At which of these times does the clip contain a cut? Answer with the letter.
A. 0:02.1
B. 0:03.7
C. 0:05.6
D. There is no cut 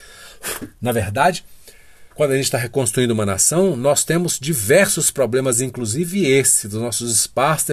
A